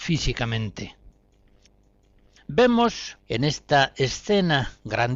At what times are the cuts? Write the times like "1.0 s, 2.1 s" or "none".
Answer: 3.2 s

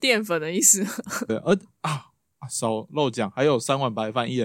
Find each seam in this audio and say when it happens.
1.3 s

